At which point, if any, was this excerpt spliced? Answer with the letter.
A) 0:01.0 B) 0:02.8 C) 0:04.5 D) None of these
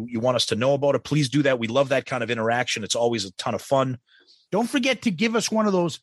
C